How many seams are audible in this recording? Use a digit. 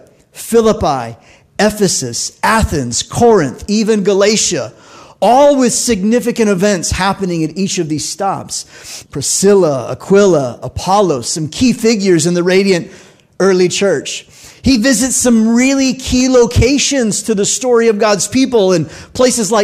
1